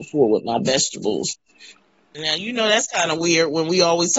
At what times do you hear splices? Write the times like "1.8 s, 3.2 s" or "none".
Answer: 2.1 s